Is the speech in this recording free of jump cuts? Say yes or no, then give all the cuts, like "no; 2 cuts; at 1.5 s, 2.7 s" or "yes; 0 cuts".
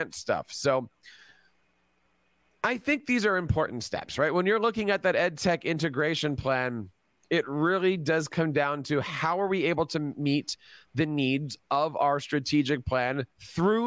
yes; 0 cuts